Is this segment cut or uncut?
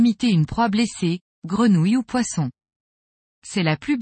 uncut